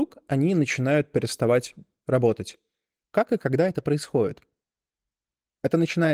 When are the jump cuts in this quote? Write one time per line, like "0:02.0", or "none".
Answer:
0:03.0